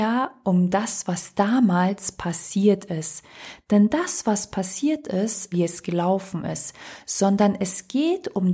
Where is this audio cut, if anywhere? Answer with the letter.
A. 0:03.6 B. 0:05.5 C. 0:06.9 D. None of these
B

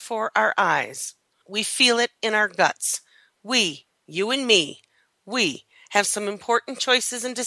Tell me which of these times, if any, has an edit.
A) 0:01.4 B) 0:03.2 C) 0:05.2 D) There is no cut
A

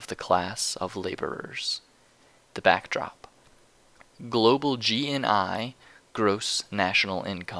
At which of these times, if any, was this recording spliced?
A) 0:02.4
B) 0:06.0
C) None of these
A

